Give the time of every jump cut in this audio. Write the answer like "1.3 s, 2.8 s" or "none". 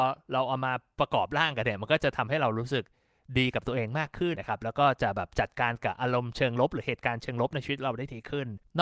4.3 s